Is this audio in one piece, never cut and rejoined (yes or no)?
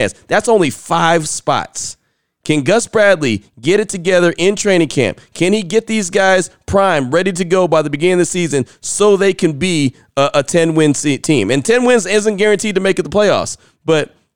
yes